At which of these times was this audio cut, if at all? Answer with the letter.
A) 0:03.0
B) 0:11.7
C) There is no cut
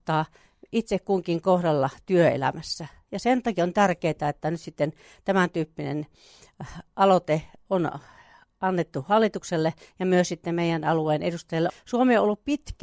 B